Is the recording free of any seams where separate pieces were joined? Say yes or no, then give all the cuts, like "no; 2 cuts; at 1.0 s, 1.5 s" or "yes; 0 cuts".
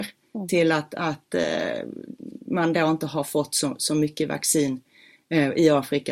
yes; 0 cuts